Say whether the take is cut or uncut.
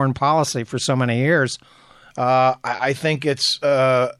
cut